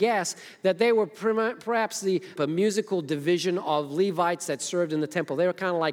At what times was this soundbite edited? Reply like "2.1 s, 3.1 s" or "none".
2.4 s